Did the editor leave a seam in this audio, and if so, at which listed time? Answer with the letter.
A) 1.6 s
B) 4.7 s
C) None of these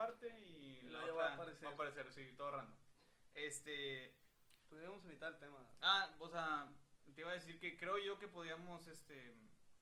B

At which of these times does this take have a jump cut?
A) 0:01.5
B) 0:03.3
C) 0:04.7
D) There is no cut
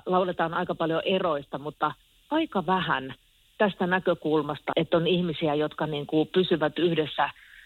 C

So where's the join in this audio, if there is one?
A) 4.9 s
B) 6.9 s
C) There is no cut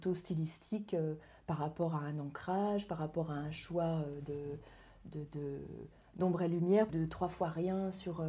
B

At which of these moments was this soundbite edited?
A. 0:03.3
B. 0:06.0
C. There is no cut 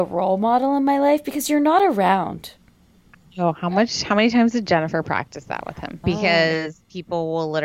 B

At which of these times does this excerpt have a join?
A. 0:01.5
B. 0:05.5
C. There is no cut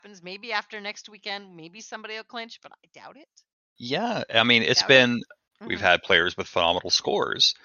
B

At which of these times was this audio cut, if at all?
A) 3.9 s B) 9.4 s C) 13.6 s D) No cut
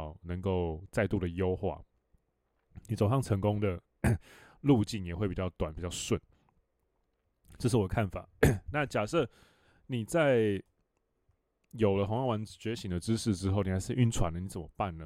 D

